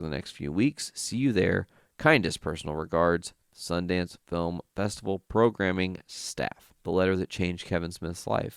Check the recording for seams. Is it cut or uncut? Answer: cut